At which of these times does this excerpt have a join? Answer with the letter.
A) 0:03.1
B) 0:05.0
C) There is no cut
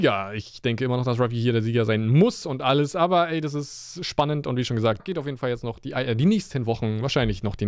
B